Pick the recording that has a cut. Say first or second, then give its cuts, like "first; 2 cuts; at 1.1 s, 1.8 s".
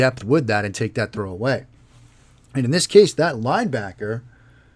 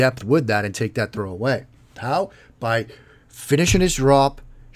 second; 1 cut; at 1.9 s